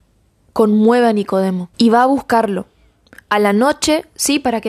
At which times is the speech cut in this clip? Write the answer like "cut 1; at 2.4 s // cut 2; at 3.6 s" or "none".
cut 1; at 1.7 s